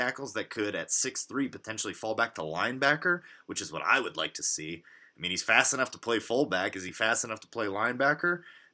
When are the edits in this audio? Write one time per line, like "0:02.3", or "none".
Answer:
none